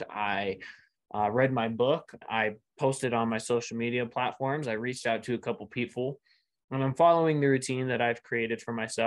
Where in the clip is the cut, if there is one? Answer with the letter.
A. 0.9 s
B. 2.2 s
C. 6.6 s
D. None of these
B